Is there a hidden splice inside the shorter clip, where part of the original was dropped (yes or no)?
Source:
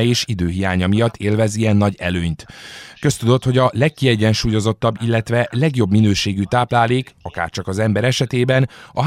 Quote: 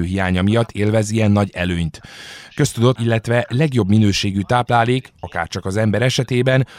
yes